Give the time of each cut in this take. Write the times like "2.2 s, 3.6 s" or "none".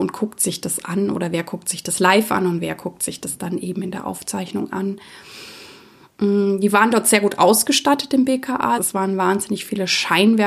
8.8 s